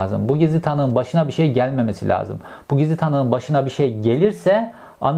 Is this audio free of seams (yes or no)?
yes